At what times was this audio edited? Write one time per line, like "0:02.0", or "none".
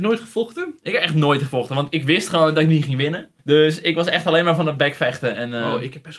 0:03.4